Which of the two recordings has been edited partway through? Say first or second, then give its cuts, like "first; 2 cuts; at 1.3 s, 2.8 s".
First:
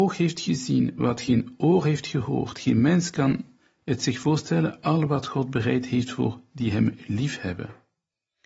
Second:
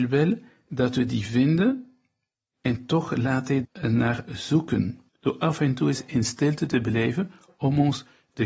second; 2 cuts; at 3.6 s, 5.1 s